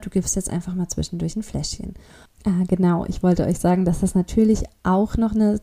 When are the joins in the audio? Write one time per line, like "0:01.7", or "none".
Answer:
0:02.2

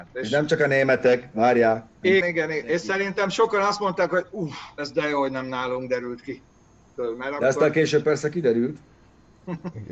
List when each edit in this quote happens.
0:02.2

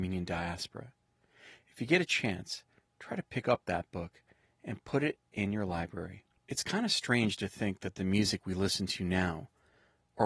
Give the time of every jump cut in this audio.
0:06.4

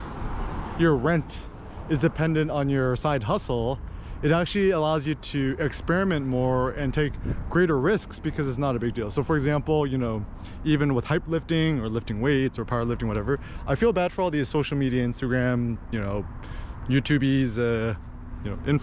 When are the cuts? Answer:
none

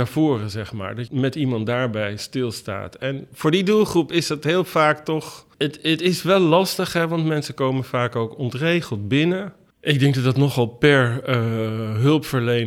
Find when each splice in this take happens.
0:09.7

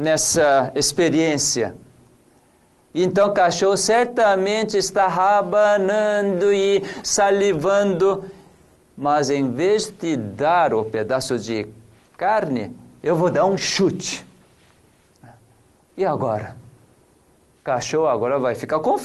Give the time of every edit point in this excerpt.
0:02.8

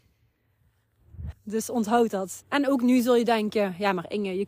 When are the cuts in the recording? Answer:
0:01.3
0:02.4

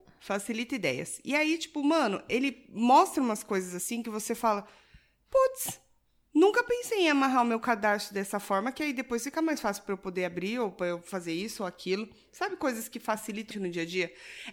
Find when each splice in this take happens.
0:13.5

